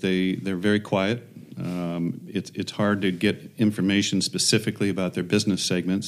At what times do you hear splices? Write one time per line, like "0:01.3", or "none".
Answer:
none